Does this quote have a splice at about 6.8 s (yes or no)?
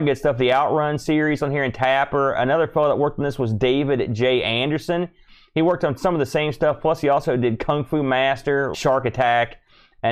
no